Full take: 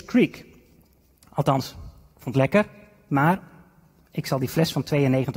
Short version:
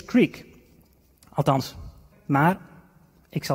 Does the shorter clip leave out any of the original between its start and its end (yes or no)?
yes